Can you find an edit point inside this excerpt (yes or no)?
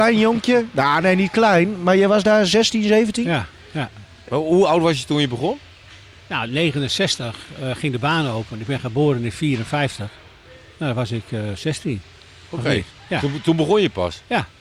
no